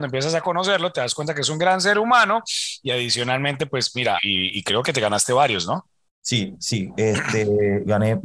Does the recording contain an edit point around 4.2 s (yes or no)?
yes